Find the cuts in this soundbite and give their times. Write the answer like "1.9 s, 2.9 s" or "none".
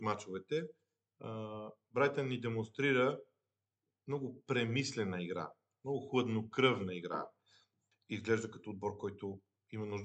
7.9 s